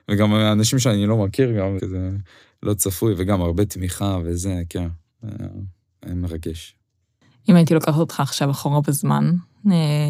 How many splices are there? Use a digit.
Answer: 1